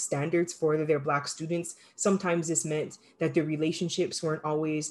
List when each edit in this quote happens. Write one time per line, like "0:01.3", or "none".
none

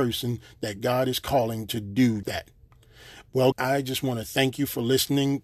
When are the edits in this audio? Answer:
0:02.2
0:03.5

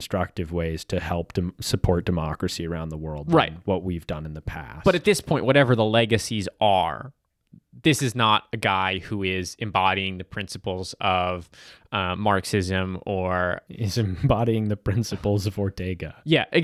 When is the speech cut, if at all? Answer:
none

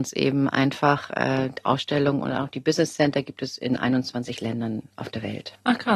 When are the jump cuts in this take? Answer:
none

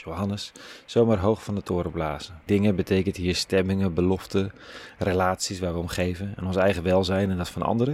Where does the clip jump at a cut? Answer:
0:02.5

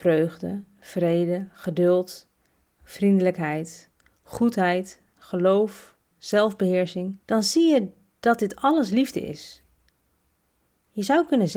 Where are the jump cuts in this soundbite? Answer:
0:06.1
0:07.2

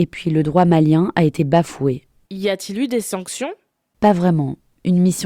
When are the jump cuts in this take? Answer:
0:02.3

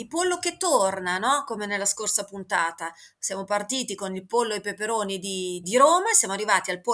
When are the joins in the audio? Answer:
0:05.6

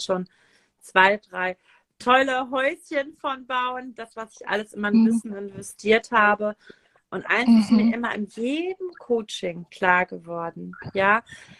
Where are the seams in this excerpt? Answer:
none

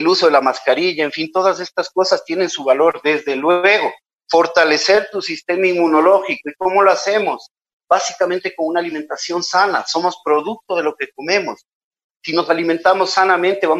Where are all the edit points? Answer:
none

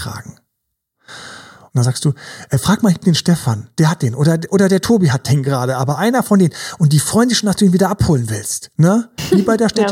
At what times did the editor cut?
0:01.7

